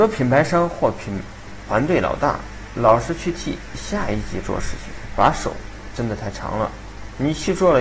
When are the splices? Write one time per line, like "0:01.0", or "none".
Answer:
none

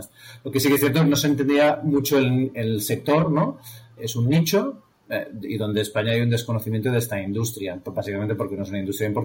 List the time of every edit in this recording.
0:04.0

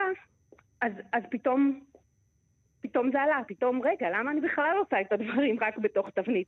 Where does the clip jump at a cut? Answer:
0:03.5

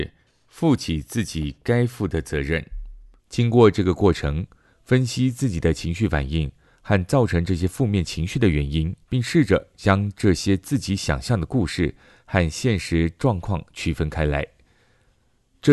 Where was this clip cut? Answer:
0:03.2
0:09.0

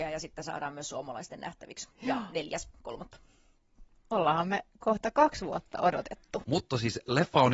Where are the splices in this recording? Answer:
0:01.9
0:06.4

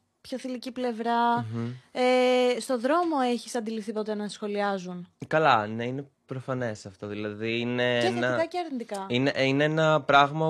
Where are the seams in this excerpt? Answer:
none

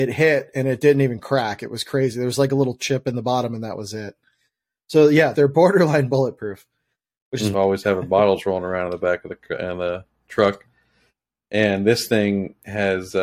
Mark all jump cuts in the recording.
0:05.3
0:07.5

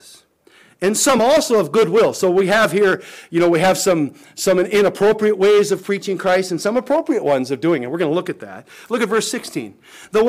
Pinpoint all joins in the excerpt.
none

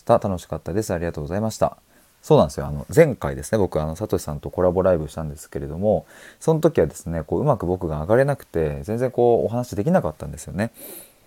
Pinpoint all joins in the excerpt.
none

